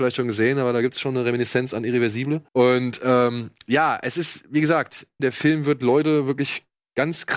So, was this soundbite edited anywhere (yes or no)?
yes